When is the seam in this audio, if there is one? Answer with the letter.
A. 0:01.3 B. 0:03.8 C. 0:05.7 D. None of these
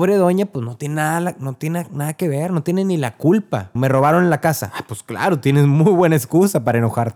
B